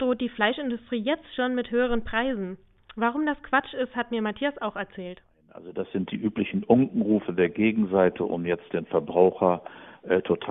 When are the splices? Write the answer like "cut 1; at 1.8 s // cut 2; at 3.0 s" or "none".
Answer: none

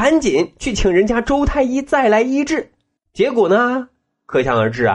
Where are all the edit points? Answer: cut 1; at 3.0 s

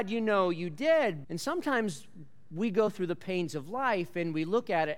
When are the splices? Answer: cut 1; at 1.2 s

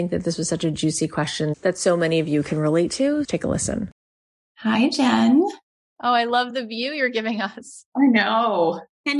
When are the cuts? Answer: cut 1; at 3.2 s

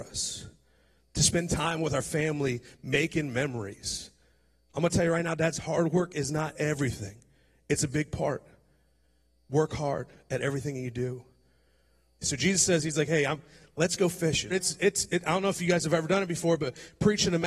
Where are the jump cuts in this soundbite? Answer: cut 1; at 12.2 s // cut 2; at 14.5 s

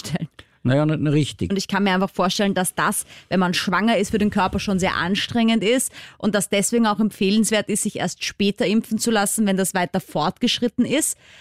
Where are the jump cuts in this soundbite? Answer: cut 1; at 1.5 s

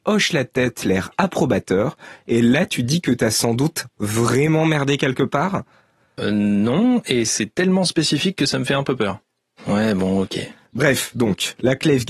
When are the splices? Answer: cut 1; at 6.2 s // cut 2; at 9.6 s

